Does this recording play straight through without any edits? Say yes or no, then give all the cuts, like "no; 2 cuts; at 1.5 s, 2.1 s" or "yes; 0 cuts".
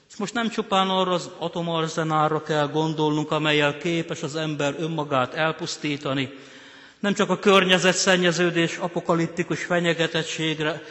yes; 0 cuts